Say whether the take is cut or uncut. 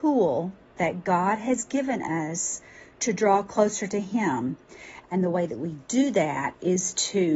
cut